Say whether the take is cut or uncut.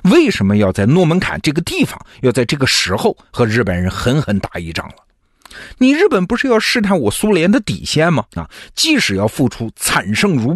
cut